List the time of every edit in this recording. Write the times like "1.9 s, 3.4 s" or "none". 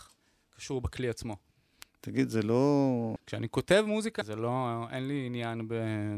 3.2 s, 4.2 s